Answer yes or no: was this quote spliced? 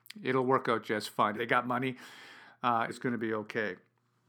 yes